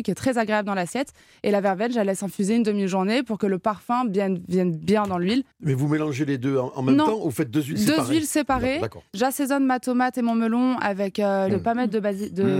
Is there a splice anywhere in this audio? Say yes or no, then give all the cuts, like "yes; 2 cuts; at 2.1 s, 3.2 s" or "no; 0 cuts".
yes; 2 cuts; at 5.5 s, 11.5 s